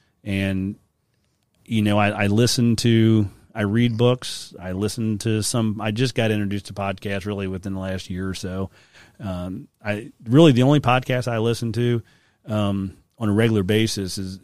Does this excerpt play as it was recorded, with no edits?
yes; 0 cuts

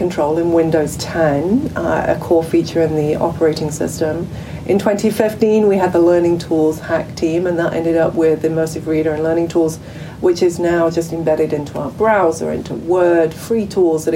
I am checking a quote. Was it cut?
no; 0 cuts

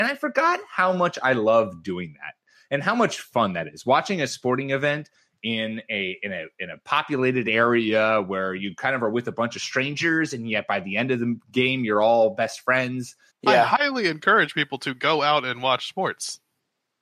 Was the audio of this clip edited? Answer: yes; 1 cut; at 13.3 s

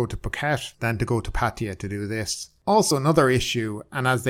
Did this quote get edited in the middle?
no; 0 cuts

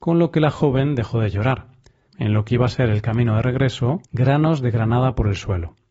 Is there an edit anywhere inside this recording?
yes; 2 cuts; at 2.1 s, 4.1 s

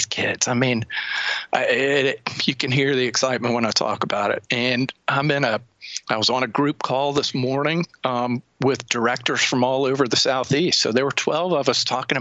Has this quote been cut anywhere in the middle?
yes; 1 cut; at 4.5 s

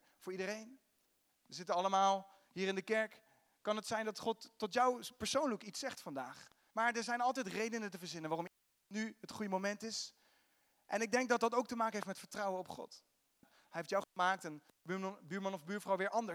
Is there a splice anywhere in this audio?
yes; 2 cuts; at 6.7 s, 13.4 s

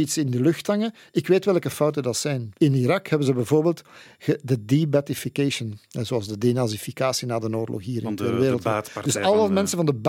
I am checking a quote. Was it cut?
yes; 1 cut; at 2.6 s

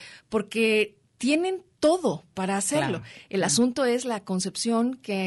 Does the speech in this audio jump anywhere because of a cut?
no; 0 cuts

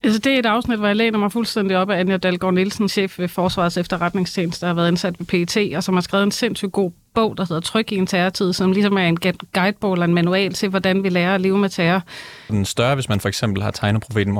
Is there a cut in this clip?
yes; 2 cuts; at 2.9 s, 12.5 s

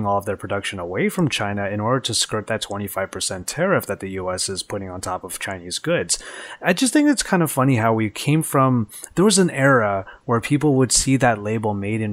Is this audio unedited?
yes; 0 cuts

